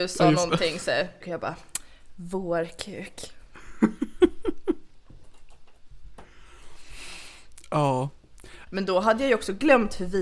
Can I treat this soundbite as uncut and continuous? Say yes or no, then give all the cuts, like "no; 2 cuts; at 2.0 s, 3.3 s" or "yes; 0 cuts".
no; 2 cuts; at 1.2 s, 8.7 s